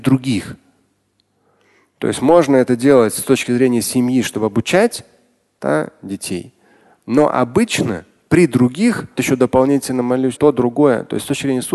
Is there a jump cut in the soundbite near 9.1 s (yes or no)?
yes